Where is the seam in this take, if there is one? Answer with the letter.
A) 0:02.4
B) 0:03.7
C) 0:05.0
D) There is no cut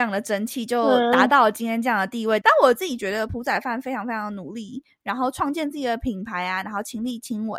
A